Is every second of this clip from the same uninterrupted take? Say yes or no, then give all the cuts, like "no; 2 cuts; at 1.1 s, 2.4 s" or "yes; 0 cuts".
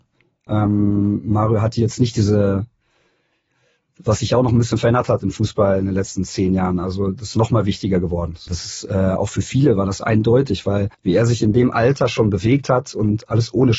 no; 2 cuts; at 8.5 s, 10.9 s